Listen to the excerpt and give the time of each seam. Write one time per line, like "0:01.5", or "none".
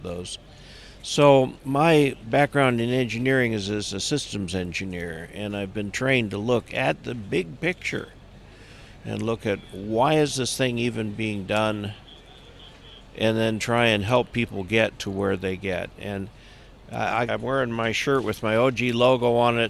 0:01.6
0:17.3